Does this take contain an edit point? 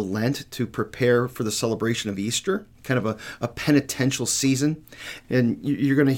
yes; 2 cuts; at 2.7 s, 5.2 s

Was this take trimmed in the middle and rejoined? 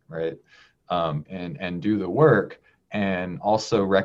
yes; 1 cut; at 1.3 s

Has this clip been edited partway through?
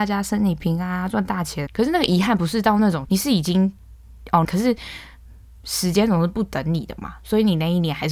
yes; 3 cuts; at 1.7 s, 3.0 s, 4.4 s

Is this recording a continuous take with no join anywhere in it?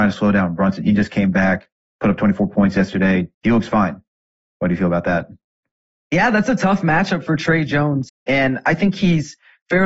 no; 2 cuts; at 3.3 s, 8.1 s

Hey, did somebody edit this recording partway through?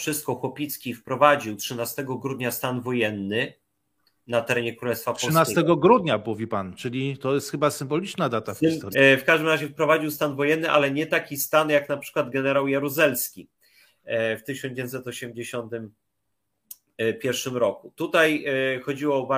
yes; 1 cut; at 8.9 s

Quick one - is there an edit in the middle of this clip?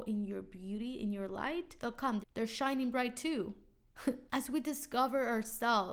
yes; 2 cuts; at 2.2 s, 4.2 s

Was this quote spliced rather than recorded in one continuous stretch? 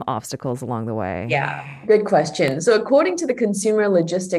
no; 0 cuts

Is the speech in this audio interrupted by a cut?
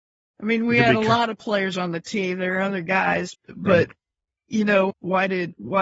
yes; 2 cuts; at 3.3 s, 4.9 s

